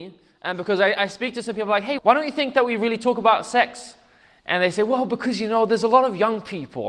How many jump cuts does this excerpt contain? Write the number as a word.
one